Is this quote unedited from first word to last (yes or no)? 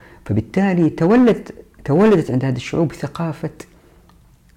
yes